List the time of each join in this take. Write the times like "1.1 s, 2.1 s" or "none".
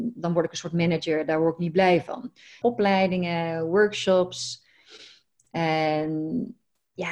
2.6 s